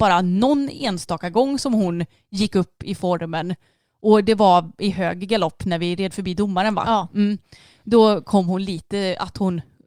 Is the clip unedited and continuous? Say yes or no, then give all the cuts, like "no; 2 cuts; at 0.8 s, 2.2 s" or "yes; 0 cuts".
yes; 0 cuts